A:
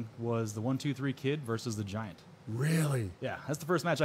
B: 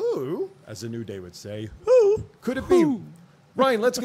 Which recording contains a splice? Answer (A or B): B